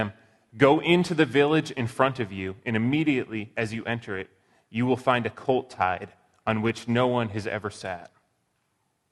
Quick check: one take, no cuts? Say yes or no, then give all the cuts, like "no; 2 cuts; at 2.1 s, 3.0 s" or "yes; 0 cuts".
yes; 0 cuts